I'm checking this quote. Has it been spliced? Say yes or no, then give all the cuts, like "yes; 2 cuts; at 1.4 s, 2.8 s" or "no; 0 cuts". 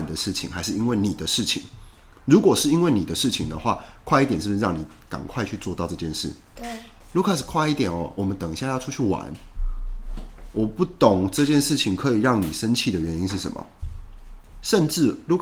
no; 0 cuts